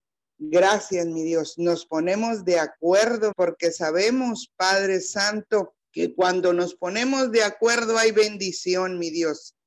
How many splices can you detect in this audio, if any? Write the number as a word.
two